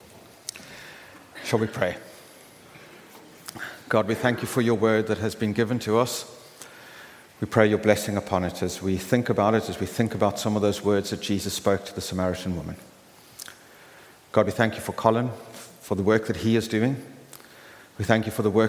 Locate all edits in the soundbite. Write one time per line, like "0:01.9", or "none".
none